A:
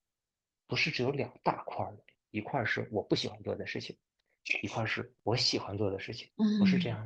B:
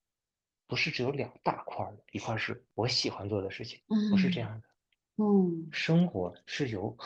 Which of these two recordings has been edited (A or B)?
B